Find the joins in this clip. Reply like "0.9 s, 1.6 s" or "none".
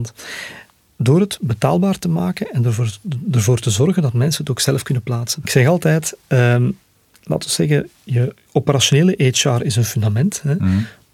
5.4 s